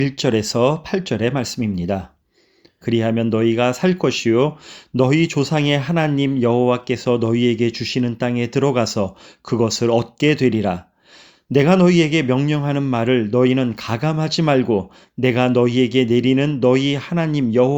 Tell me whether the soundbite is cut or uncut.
cut